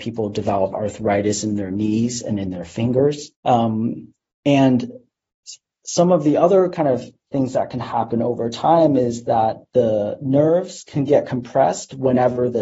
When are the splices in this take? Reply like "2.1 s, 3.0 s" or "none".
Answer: 3.3 s